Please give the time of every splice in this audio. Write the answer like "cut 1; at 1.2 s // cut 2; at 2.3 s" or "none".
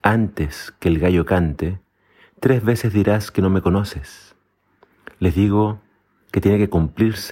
none